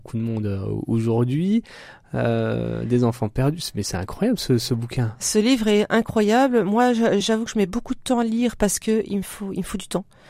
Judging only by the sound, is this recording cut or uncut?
uncut